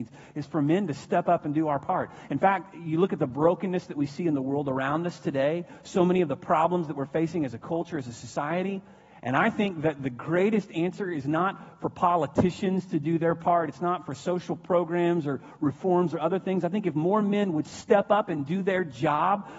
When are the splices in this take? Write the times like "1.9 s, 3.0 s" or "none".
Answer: none